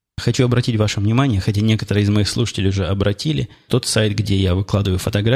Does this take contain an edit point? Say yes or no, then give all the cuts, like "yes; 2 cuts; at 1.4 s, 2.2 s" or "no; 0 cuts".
yes; 1 cut; at 3.7 s